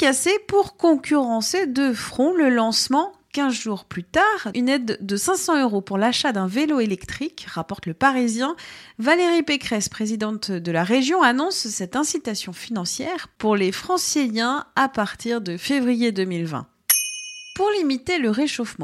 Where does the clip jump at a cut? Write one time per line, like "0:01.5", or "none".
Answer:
0:04.5